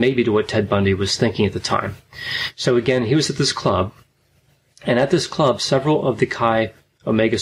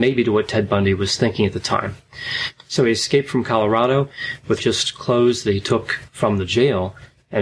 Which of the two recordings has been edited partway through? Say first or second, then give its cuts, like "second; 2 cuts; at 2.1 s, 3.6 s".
second; 2 cuts; at 2.5 s, 4.6 s